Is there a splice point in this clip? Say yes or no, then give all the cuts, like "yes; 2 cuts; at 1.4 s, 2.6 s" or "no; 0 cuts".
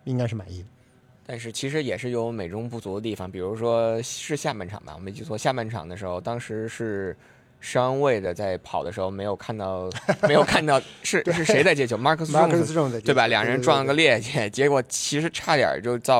no; 0 cuts